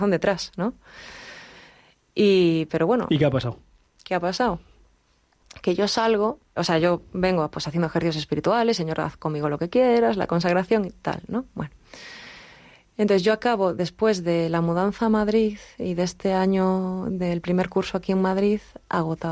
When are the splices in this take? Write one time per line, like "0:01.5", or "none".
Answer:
0:06.6